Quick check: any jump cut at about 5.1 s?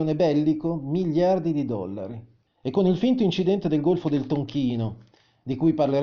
no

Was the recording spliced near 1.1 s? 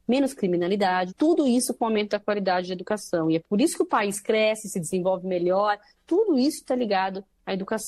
yes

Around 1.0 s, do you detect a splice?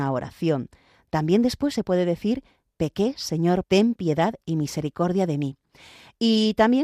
no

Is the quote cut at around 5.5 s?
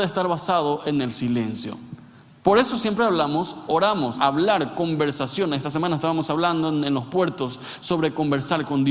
no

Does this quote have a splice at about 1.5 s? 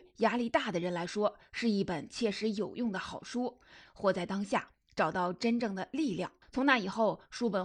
no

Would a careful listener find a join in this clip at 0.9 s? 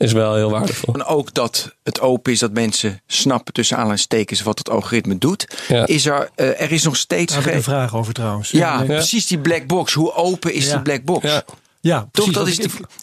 yes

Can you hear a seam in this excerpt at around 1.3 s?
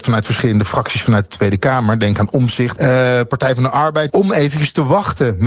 no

